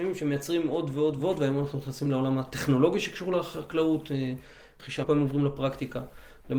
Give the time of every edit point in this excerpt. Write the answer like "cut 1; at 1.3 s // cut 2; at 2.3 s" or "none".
cut 1; at 1.2 s // cut 2; at 5.0 s